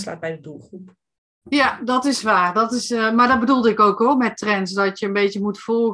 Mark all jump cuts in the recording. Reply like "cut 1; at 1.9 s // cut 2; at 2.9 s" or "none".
none

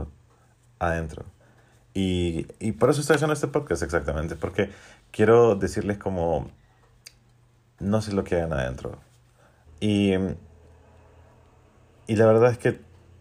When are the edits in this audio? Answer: cut 1; at 9.7 s

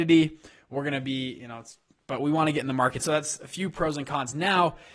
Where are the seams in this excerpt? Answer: cut 1; at 3.0 s

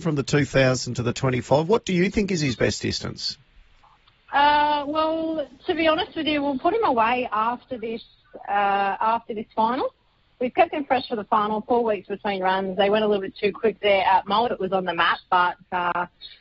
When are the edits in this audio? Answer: cut 1; at 14.5 s

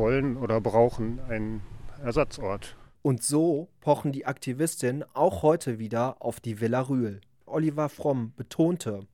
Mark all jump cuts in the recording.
cut 1; at 3.0 s // cut 2; at 7.5 s

